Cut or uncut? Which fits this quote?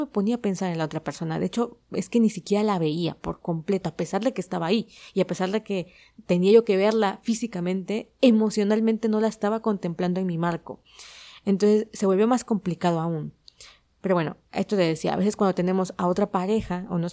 uncut